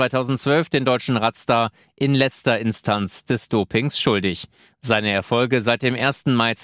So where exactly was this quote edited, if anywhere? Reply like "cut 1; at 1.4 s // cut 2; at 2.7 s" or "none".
none